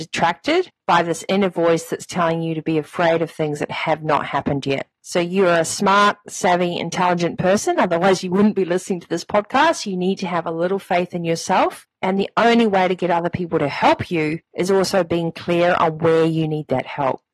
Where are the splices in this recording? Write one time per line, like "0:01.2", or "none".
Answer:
none